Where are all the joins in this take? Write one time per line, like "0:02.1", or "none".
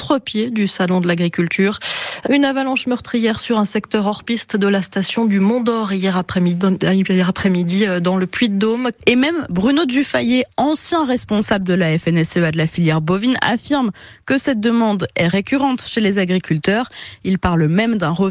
0:02.3
0:09.0